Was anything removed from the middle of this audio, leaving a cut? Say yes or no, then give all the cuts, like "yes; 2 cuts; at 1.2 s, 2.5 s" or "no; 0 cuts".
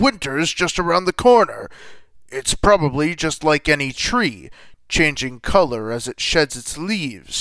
no; 0 cuts